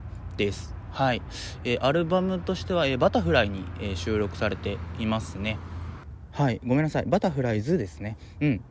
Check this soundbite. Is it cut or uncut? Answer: uncut